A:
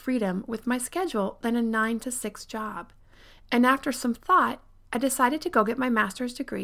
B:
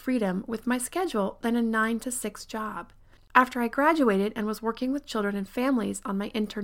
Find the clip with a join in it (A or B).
B